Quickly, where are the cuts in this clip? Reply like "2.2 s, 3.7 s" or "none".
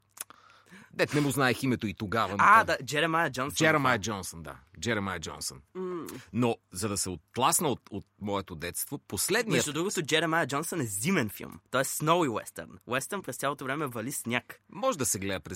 5.7 s